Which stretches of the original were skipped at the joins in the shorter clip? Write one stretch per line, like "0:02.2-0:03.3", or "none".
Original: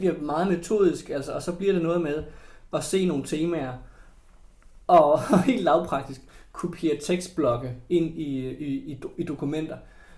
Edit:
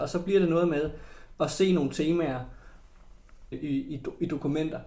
0:04.9-0:08.5